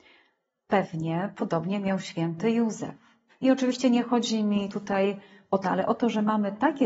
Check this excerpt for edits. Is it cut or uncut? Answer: cut